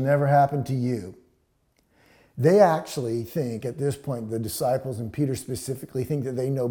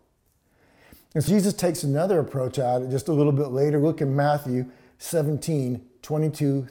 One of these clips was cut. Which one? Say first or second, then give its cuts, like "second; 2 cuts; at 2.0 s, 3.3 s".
second; 1 cut; at 1.3 s